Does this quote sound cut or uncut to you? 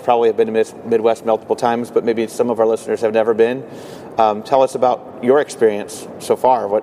uncut